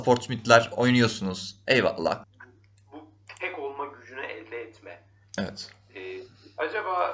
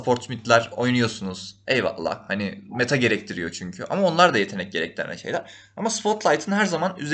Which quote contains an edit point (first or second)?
first